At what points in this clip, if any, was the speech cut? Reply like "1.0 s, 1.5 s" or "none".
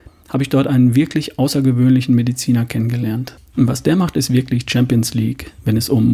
3.4 s